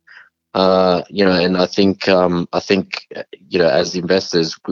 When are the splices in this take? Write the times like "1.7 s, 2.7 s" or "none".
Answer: none